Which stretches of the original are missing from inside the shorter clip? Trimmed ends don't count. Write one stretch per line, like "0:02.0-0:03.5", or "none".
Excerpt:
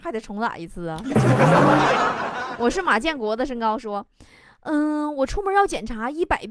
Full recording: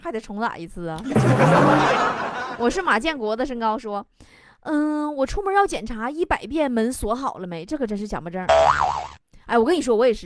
none